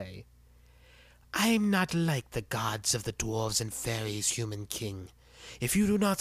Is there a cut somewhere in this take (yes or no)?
no